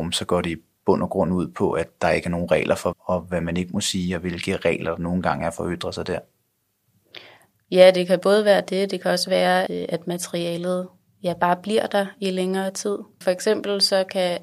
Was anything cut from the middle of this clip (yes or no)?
yes